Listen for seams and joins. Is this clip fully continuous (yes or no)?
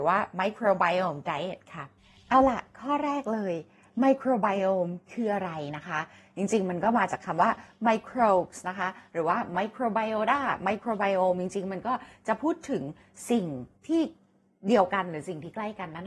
no